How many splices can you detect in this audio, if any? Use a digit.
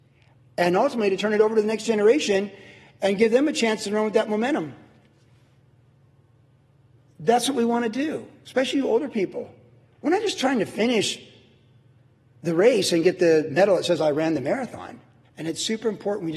1